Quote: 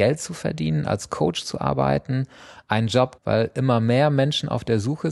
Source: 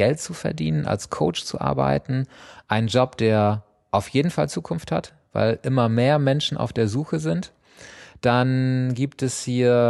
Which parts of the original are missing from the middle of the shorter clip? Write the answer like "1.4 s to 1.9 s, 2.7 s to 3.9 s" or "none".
3.2 s to 5.2 s